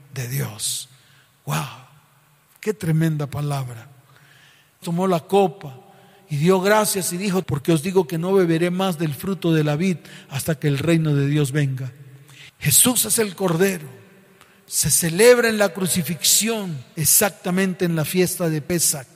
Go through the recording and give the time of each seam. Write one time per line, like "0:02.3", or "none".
0:04.8
0:07.4
0:12.5